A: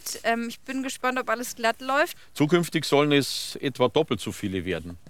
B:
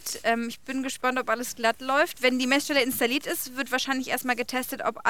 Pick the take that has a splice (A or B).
A